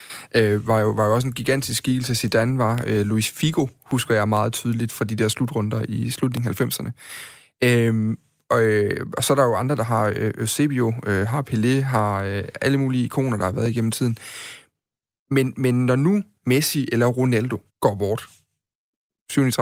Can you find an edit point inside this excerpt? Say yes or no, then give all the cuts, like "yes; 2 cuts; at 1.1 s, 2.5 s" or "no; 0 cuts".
yes; 1 cut; at 17.7 s